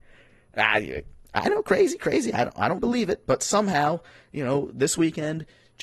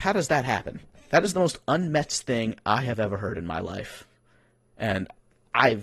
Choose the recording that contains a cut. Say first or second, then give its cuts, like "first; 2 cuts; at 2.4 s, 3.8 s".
first; 1 cut; at 2.8 s